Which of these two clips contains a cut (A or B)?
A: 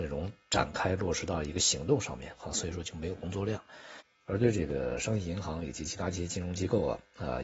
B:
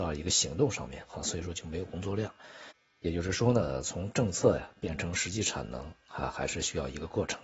A